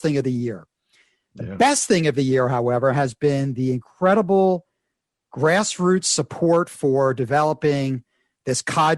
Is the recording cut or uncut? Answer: uncut